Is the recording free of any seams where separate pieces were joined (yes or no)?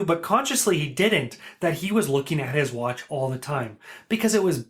yes